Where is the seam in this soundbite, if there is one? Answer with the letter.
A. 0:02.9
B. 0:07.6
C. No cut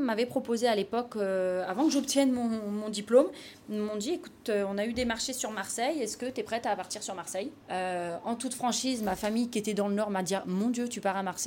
B